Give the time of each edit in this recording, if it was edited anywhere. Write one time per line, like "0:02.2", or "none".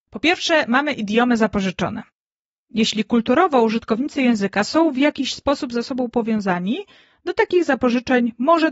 none

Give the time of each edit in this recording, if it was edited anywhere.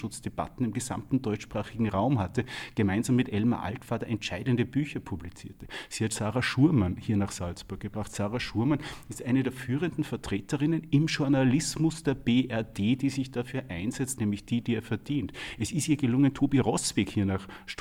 0:14.2

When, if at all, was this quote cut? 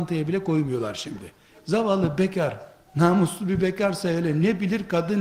0:01.5

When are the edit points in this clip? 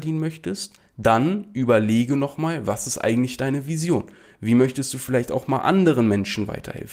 none

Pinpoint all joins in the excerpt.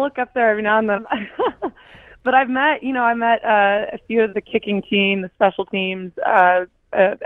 0:01.0
0:04.3

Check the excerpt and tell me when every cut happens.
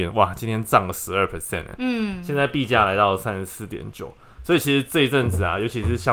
none

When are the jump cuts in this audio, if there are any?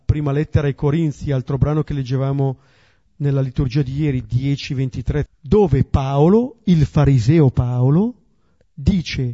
0:05.3

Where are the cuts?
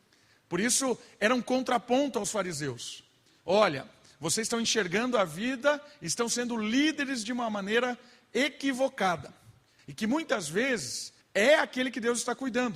0:09.8
0:11.2

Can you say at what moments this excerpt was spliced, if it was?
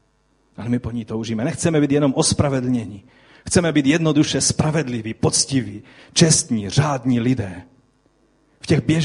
none

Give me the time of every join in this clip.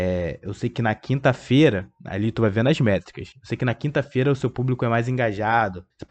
none

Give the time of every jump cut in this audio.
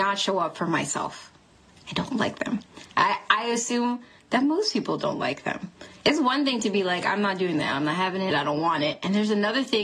0:08.3

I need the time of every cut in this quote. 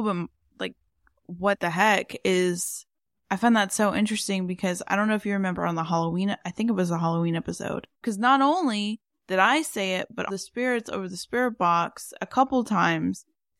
0:08.0
0:10.3

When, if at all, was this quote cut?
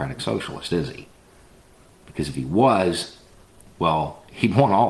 none

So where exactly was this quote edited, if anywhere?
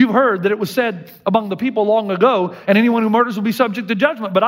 0:02.7

